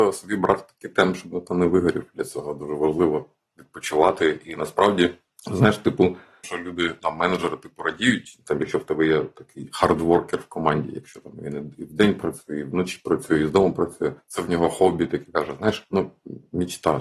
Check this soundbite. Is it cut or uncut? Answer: cut